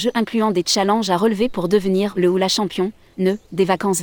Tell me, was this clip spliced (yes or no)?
no